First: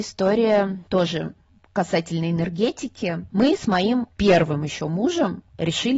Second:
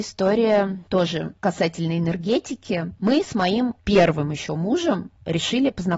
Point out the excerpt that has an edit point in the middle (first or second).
second